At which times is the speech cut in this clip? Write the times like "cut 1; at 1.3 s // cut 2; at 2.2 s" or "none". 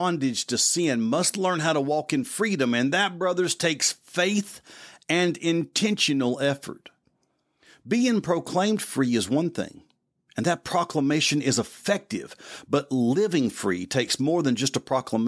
none